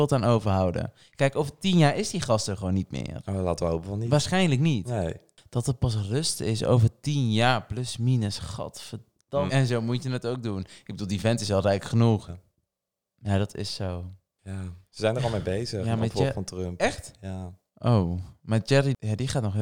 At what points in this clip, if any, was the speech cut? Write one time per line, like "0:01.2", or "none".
0:09.5
0:12.3